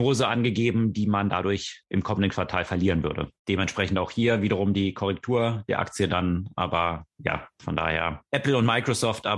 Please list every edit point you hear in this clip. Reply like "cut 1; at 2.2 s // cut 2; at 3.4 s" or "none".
none